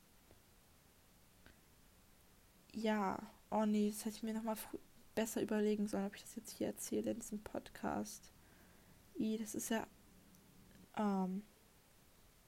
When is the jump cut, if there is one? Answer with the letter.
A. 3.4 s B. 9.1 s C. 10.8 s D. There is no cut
C